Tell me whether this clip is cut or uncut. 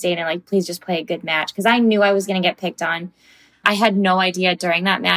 cut